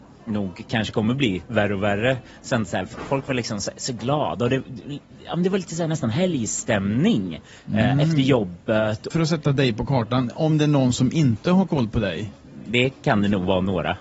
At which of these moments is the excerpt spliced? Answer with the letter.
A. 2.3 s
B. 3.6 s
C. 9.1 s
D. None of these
C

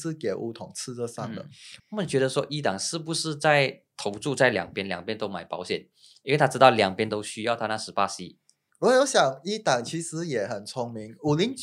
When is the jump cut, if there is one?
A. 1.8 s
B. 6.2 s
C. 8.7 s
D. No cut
A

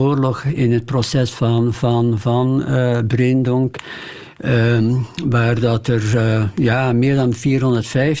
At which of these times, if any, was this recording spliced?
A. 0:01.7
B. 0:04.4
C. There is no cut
C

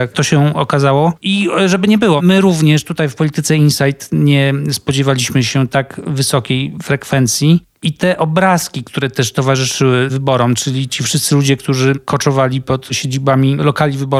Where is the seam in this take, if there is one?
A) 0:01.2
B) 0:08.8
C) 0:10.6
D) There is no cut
A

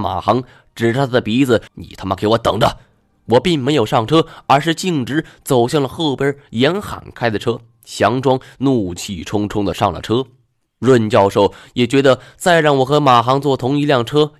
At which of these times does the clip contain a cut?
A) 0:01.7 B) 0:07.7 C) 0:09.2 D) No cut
A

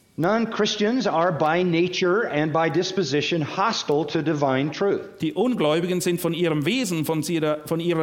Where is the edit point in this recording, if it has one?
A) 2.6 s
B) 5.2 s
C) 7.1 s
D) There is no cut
D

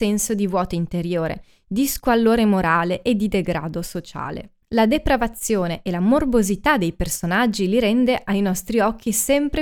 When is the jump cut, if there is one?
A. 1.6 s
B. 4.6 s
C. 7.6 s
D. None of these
B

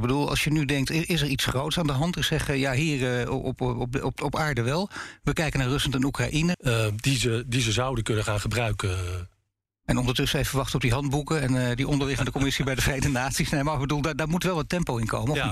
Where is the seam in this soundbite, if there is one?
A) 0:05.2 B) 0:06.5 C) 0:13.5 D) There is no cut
B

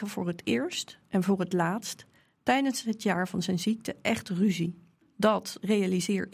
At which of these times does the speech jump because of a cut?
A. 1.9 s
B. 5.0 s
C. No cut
B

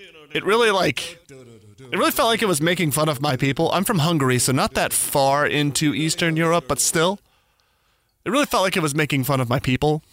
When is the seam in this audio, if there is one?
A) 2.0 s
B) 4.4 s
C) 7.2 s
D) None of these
D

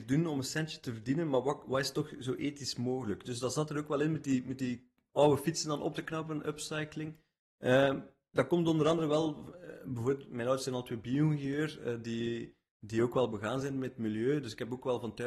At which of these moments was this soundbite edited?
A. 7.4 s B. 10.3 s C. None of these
C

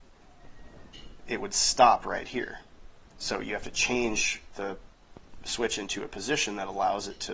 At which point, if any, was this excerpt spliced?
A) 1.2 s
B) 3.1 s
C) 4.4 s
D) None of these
B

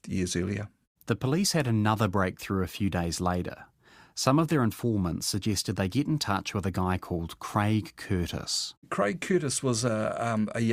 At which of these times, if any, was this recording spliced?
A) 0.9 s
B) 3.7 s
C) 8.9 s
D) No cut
D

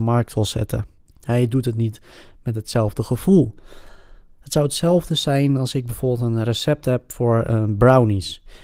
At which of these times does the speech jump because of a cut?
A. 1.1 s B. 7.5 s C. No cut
A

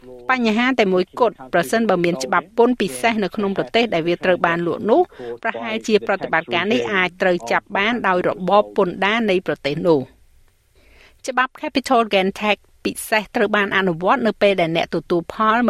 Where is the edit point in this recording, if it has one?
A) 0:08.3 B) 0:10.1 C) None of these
C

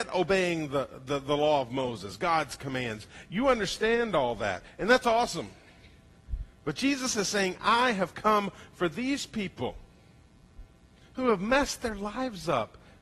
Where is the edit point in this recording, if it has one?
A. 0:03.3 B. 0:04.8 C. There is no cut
C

